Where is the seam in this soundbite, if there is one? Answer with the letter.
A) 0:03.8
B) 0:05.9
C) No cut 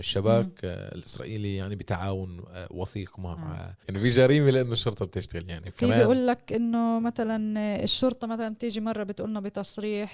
A